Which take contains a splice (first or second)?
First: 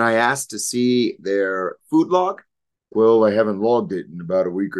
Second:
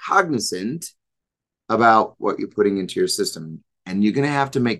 first